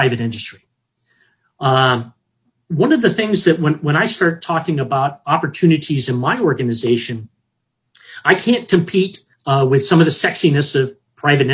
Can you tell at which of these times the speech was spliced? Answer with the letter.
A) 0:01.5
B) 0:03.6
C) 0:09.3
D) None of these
C